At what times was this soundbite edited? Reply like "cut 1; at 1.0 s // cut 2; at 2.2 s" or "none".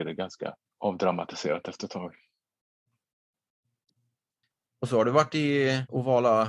none